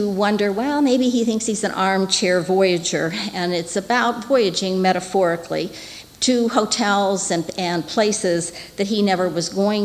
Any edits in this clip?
no; 0 cuts

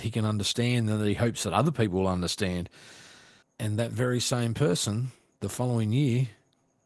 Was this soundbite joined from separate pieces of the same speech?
yes; 1 cut; at 3.4 s

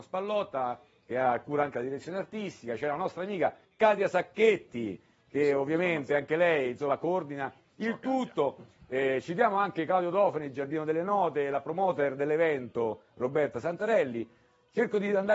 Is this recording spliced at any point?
no; 0 cuts

